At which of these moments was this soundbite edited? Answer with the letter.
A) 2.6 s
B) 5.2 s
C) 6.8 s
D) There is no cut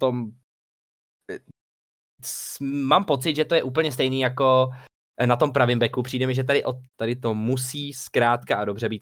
C